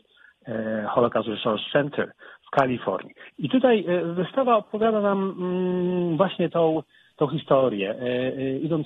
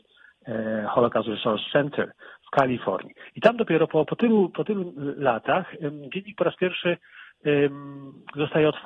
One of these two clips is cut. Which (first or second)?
first